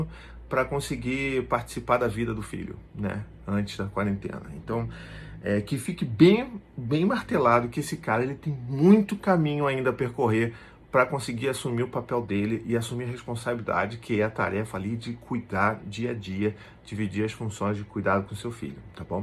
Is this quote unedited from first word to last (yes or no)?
yes